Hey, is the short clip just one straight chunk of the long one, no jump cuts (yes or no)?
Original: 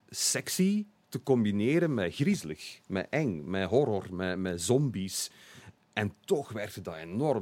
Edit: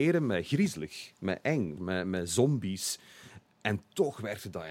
no